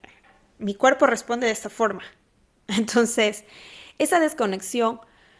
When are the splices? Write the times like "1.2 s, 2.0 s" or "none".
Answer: none